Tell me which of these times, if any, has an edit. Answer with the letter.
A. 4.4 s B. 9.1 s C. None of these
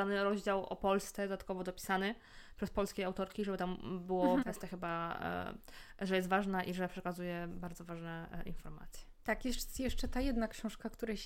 A